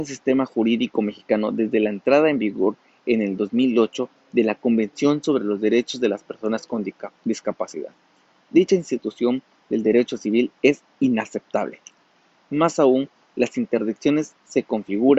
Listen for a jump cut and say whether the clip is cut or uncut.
uncut